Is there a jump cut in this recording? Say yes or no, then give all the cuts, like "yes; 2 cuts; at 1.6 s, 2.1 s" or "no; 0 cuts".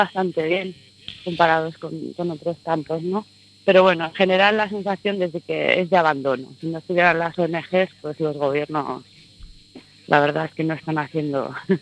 no; 0 cuts